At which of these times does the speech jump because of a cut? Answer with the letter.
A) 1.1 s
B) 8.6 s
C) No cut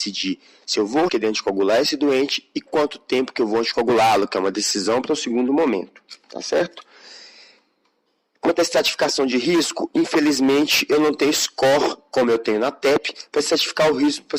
A